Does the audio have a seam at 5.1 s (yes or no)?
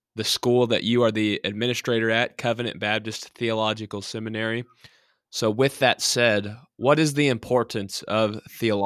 no